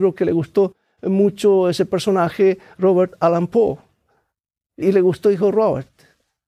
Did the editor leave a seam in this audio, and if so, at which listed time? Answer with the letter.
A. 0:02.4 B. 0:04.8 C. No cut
B